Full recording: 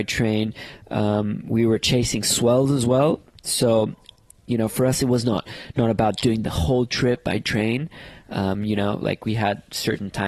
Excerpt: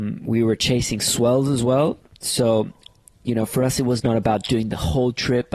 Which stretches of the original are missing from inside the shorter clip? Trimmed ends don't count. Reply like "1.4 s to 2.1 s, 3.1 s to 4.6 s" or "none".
5.2 s to 5.7 s